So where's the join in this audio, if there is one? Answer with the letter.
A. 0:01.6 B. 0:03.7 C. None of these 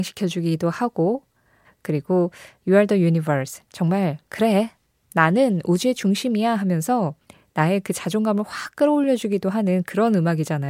A